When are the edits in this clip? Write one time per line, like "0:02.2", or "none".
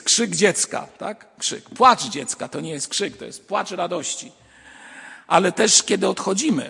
none